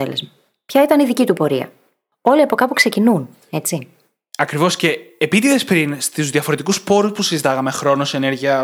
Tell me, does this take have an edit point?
no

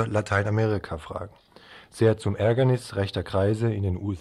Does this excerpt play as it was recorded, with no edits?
yes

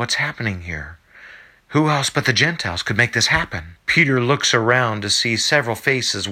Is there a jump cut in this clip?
yes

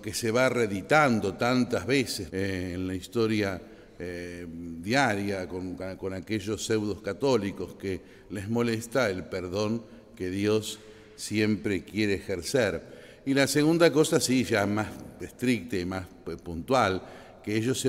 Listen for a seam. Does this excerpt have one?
yes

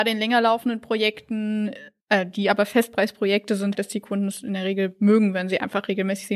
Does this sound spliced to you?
yes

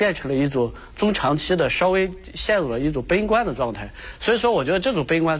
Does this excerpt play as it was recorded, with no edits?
yes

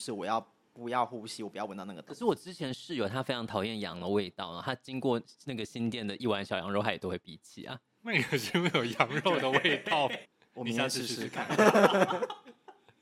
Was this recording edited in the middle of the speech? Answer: yes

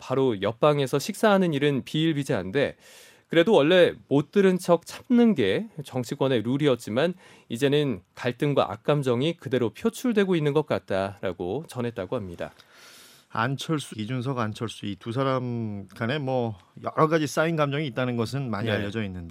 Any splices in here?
yes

